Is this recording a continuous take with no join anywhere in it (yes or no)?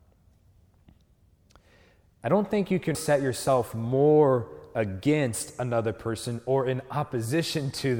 no